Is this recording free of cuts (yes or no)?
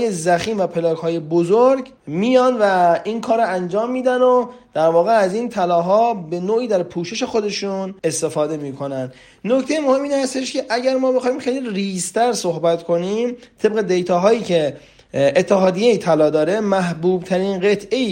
no